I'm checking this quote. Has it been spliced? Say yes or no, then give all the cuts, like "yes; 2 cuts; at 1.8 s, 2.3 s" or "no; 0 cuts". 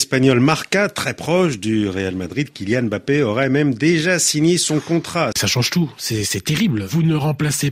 yes; 1 cut; at 5.3 s